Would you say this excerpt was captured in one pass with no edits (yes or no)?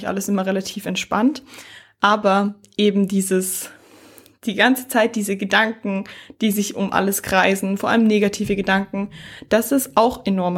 yes